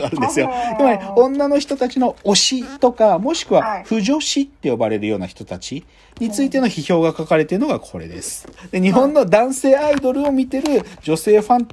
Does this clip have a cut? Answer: yes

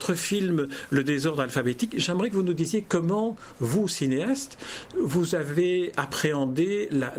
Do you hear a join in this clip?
no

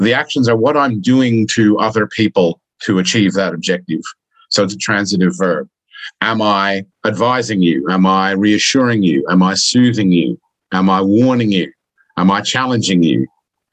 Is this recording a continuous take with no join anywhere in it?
no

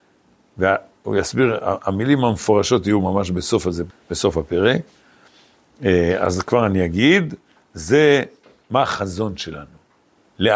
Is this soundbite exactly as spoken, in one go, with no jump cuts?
no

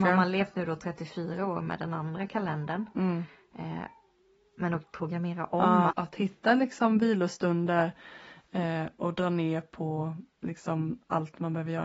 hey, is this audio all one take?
no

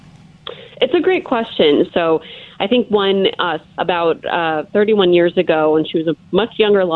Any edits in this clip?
yes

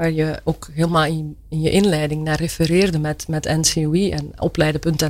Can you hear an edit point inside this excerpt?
no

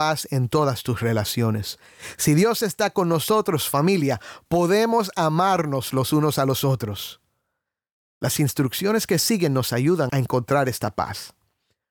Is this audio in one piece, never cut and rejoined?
no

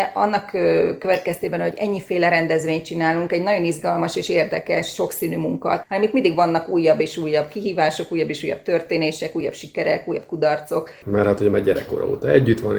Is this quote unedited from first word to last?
no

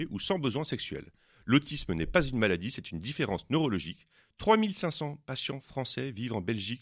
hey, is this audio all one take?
no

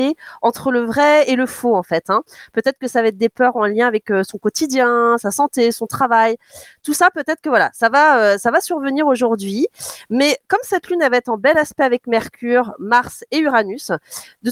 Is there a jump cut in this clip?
no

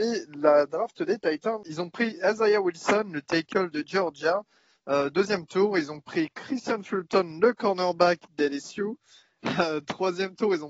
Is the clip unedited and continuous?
no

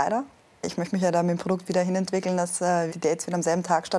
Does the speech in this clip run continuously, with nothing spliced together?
no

